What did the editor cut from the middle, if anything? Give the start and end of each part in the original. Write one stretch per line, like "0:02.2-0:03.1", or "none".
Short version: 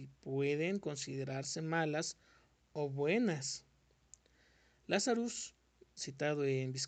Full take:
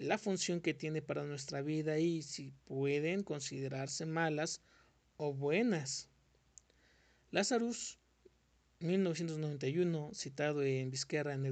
0:08.4-0:10.1